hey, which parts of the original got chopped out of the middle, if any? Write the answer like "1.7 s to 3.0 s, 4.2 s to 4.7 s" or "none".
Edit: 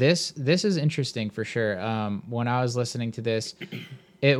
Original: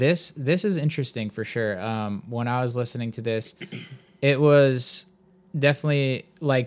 none